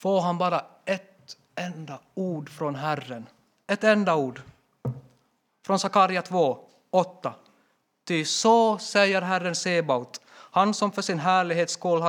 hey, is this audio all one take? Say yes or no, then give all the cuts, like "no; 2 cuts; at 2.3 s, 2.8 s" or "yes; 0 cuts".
yes; 0 cuts